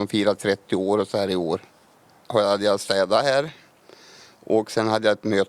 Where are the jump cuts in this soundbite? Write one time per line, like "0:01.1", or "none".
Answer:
0:02.2